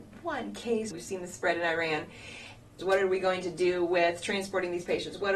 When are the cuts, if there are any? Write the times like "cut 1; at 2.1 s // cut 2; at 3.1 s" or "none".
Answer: cut 1; at 0.9 s // cut 2; at 2.8 s